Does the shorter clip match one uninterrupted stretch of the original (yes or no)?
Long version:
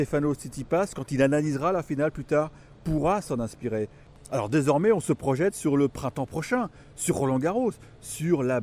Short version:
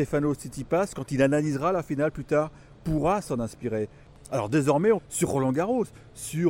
no